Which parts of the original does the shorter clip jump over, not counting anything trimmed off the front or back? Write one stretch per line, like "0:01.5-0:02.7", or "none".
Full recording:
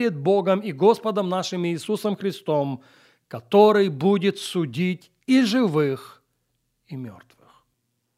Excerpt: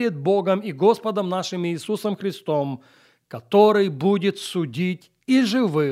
none